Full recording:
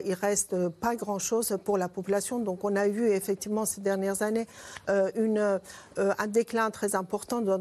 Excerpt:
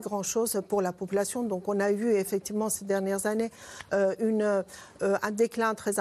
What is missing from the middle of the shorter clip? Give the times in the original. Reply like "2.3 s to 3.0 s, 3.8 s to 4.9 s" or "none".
none